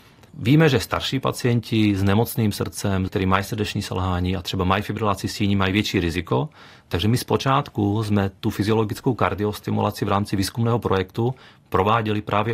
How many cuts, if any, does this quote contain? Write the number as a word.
one